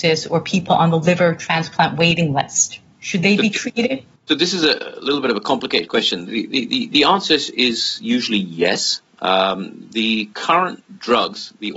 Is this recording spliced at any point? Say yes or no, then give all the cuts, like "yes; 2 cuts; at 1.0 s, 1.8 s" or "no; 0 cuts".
no; 0 cuts